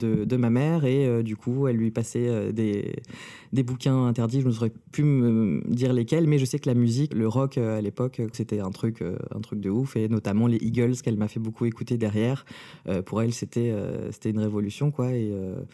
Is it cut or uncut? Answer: cut